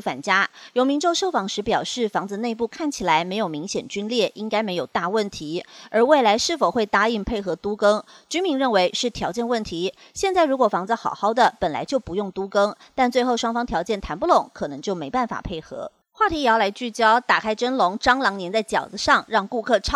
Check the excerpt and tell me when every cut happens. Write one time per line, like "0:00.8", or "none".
0:16.0